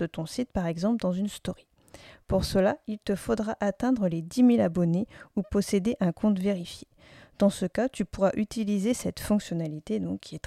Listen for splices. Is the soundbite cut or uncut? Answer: uncut